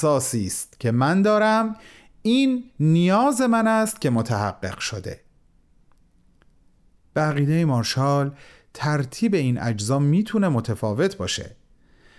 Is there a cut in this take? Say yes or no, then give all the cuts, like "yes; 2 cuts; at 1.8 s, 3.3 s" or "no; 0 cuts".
no; 0 cuts